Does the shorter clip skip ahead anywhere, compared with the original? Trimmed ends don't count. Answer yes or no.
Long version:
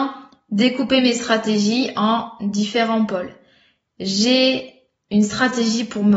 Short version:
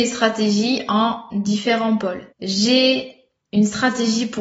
yes